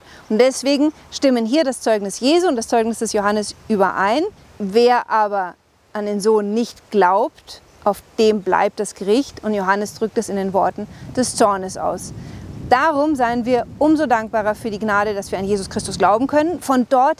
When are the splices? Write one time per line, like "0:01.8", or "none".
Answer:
0:04.4